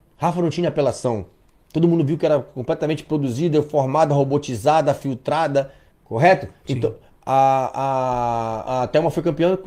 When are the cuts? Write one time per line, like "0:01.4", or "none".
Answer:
0:05.9
0:08.7